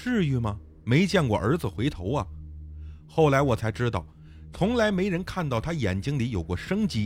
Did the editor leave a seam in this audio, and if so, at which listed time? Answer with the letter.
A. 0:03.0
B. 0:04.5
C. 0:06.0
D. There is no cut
B